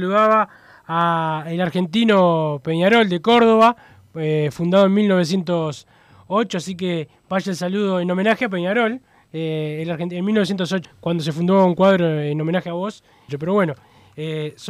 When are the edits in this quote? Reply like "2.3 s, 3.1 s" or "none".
10.8 s, 13.3 s